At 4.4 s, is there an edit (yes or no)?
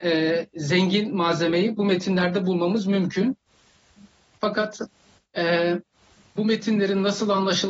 yes